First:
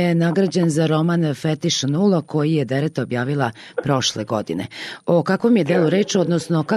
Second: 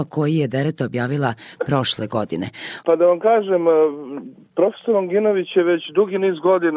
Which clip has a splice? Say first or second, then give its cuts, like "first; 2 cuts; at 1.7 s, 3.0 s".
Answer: second; 1 cut; at 2.8 s